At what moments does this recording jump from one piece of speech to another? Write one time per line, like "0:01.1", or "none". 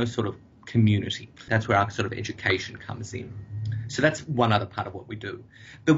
0:01.5

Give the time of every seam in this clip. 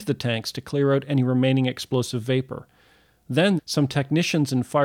0:03.6

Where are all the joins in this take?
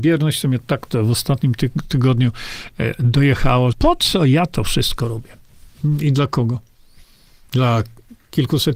0:03.7

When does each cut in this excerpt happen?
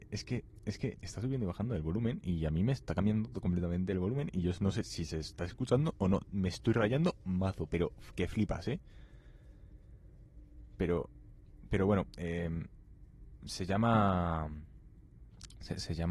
0:01.0

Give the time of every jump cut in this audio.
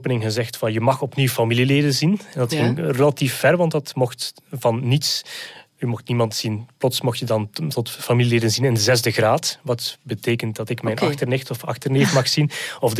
none

